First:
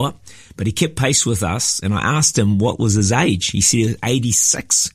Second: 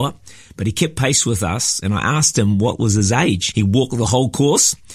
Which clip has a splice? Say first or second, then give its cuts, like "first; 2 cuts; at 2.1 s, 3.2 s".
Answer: second; 1 cut; at 3.5 s